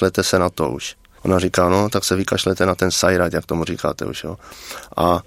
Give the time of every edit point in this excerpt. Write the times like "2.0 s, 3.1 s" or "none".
1.2 s